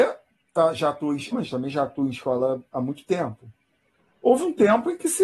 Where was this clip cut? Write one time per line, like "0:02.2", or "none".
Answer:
0:01.3